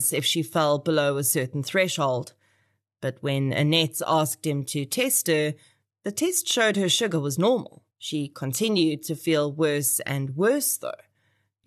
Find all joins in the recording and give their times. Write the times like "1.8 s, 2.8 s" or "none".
7.9 s